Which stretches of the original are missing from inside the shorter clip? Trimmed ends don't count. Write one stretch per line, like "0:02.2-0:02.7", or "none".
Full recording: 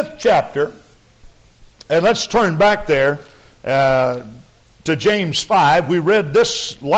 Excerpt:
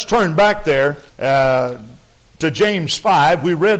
0:03.3-0:03.5